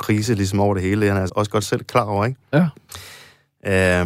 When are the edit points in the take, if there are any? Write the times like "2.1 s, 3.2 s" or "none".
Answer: 1.3 s